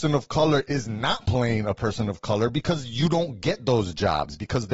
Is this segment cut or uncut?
uncut